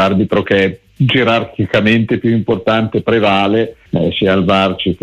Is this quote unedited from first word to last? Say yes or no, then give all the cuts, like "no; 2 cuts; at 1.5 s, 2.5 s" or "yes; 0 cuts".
no; 1 cut; at 3.9 s